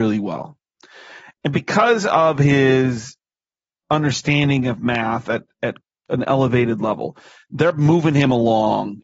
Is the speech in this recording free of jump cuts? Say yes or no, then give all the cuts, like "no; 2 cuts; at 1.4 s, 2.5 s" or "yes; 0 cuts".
yes; 0 cuts